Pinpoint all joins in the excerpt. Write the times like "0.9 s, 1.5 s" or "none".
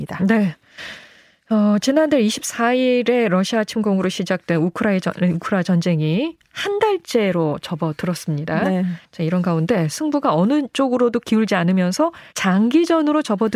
12.3 s